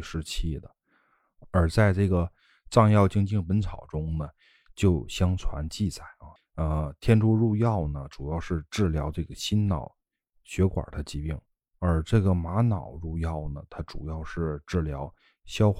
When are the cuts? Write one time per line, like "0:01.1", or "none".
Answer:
0:06.4